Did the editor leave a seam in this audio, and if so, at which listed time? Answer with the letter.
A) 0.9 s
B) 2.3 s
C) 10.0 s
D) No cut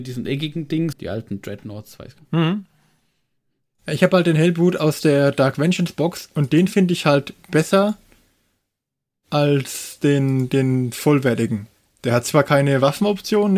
A